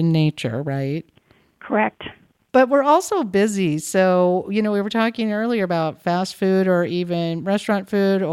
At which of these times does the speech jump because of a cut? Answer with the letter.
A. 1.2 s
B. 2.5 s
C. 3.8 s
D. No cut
B